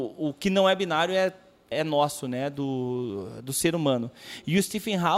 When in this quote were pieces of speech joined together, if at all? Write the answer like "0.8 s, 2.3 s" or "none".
1.7 s